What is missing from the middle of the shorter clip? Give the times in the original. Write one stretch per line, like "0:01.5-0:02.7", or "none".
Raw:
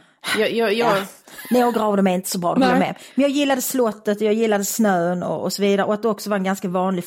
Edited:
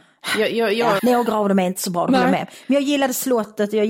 0:01.0-0:01.5